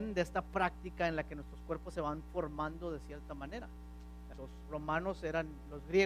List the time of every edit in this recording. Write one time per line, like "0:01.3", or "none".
0:04.3